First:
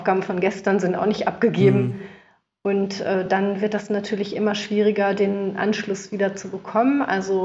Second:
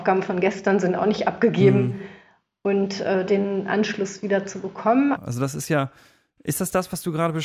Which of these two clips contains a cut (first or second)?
second